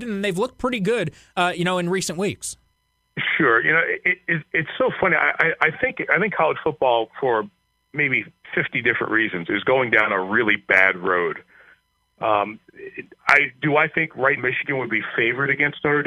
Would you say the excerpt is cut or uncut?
cut